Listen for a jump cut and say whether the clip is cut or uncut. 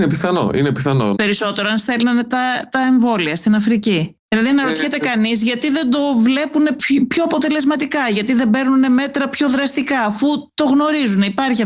cut